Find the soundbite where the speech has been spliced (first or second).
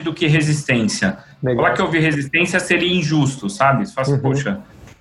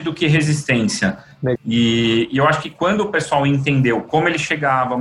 second